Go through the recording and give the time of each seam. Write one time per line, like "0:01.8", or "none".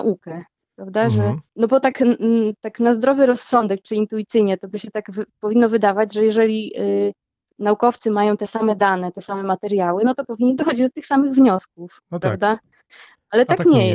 0:01.5
0:12.9